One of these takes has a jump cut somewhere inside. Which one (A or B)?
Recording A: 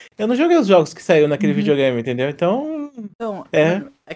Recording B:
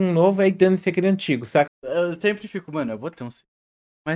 B